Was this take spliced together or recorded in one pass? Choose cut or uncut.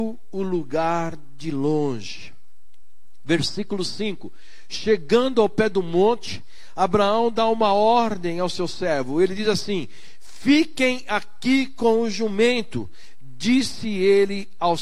uncut